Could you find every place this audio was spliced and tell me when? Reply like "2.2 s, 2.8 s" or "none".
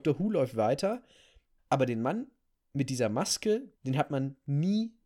1.6 s, 3.7 s